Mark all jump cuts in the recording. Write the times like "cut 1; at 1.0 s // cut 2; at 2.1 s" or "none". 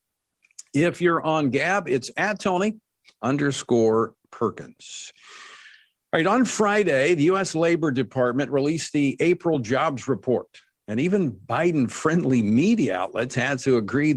none

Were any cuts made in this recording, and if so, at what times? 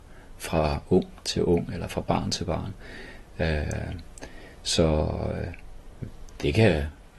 none

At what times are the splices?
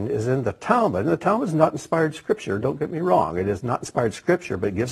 none

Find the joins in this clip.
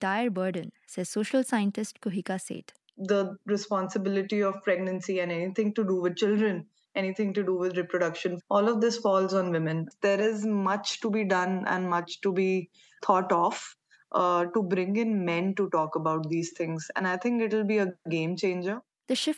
cut 1; at 13.0 s

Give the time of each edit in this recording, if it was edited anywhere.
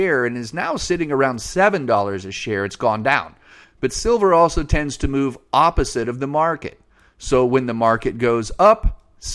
cut 1; at 3.6 s

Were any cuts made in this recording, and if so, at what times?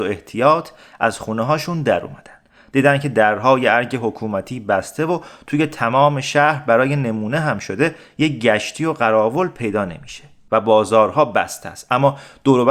none

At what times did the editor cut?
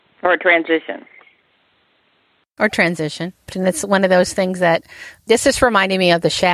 cut 1; at 3.5 s

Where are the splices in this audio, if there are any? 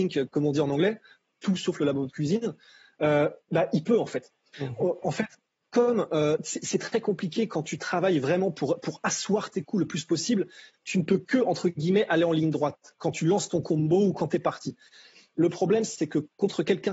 cut 1; at 4.5 s // cut 2; at 8.8 s

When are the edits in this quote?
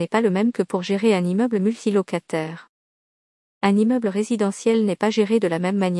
cut 1; at 3.4 s

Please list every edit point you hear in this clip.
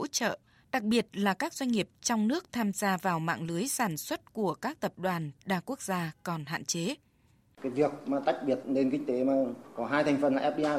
cut 1; at 7.5 s

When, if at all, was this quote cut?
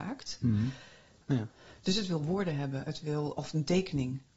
cut 1; at 1.2 s

